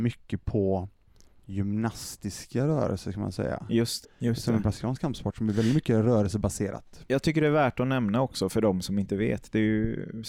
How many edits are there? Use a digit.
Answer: 1